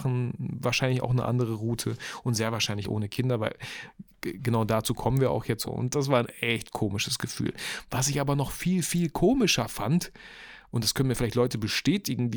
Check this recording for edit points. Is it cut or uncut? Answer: cut